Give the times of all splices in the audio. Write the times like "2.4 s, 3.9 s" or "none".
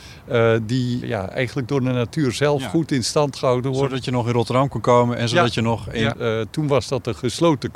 1.0 s, 6.1 s